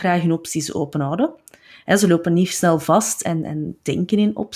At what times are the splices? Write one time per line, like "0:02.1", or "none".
none